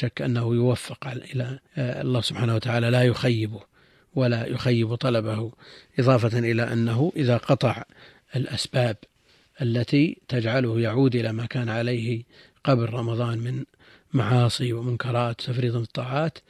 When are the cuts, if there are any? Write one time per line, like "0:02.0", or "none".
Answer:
0:01.7